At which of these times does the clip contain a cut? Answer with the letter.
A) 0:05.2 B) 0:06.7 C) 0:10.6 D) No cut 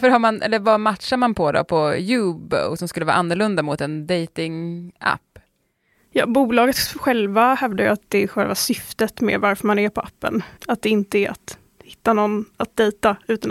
C